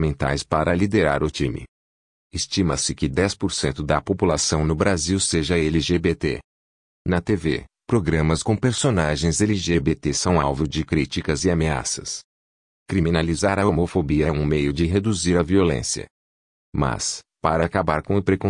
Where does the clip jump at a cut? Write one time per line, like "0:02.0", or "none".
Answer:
none